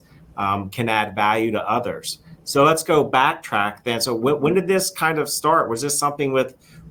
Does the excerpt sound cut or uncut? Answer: uncut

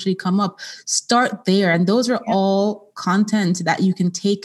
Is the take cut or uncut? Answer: uncut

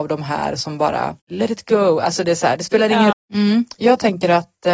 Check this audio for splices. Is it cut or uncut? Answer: cut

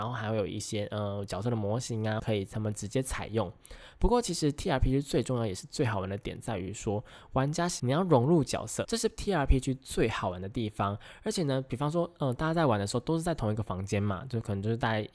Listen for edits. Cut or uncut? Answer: cut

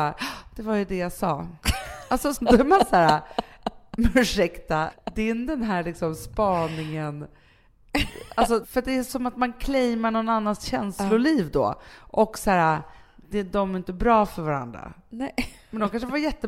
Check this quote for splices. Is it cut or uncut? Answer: cut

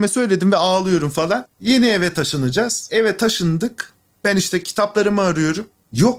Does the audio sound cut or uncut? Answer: cut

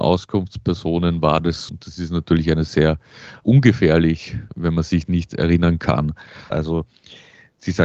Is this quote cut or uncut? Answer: cut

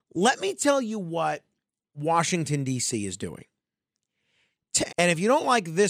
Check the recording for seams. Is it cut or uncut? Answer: cut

